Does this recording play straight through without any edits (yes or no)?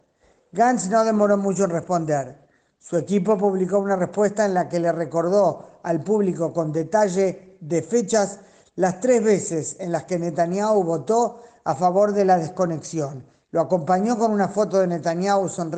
no